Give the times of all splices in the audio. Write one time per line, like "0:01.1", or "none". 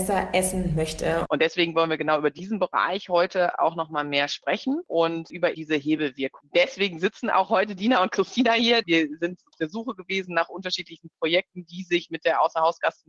0:01.3
0:05.5